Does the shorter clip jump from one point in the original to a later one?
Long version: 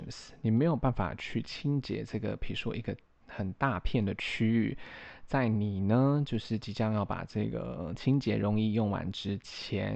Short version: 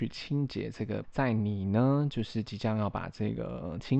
yes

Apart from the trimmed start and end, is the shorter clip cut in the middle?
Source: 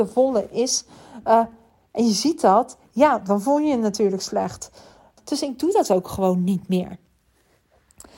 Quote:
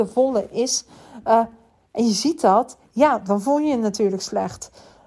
no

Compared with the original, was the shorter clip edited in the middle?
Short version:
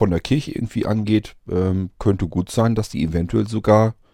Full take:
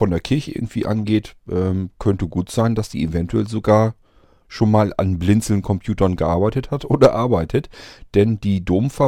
no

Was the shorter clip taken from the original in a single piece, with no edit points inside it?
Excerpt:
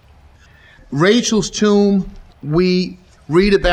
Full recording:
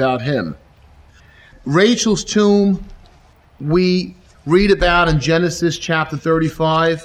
no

